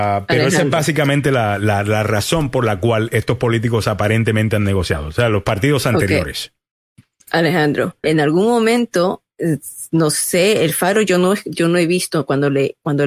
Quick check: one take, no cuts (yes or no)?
no